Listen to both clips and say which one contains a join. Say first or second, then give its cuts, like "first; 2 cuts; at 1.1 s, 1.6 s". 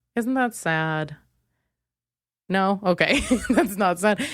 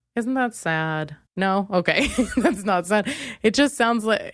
second; 1 cut; at 1.3 s